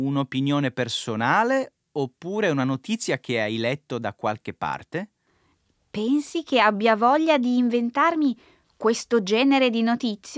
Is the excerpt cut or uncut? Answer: uncut